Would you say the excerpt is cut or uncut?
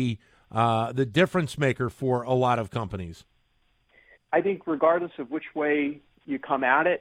cut